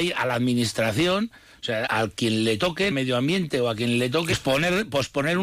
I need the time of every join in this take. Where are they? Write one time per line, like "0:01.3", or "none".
0:01.9
0:02.9